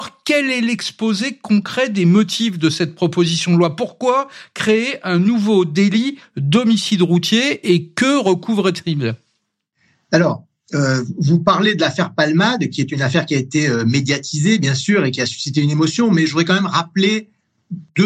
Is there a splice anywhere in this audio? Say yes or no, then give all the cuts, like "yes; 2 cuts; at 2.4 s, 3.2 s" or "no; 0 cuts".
no; 0 cuts